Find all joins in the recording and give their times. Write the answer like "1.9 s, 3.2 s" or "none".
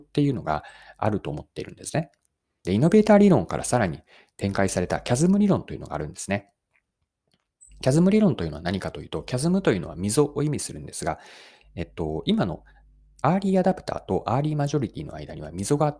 2.6 s